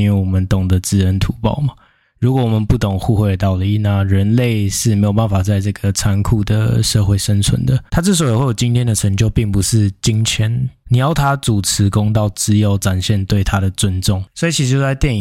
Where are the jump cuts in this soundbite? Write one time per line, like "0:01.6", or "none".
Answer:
0:07.9
0:10.8